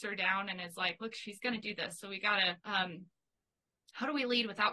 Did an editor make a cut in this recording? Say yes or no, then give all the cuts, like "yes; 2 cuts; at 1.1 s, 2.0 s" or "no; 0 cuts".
yes; 1 cut; at 2.6 s